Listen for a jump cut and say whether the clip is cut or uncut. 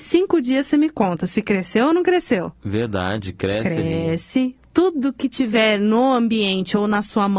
uncut